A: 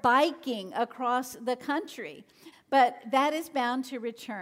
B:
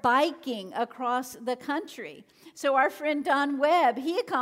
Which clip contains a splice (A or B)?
A